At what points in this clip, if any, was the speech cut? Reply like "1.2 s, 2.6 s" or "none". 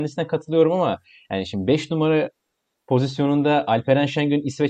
none